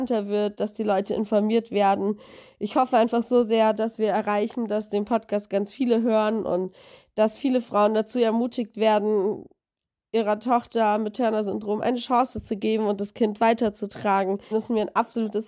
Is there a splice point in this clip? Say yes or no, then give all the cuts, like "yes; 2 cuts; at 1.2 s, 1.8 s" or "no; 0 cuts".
yes; 1 cut; at 14.5 s